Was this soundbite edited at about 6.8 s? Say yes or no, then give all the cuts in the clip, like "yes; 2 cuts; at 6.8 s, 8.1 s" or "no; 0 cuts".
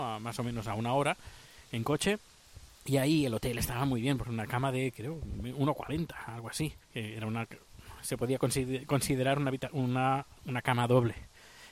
yes; 1 cut; at 6.8 s